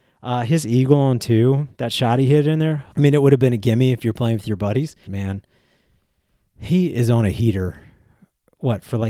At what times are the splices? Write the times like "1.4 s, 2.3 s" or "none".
2.9 s, 5.1 s